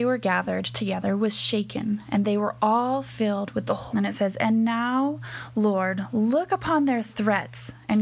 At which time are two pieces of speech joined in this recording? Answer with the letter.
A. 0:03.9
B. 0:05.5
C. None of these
A